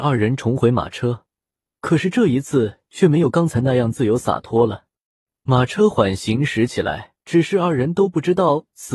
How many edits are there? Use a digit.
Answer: 2